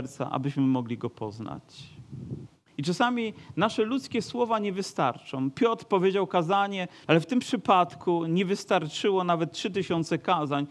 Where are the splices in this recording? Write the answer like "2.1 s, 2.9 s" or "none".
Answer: 7.1 s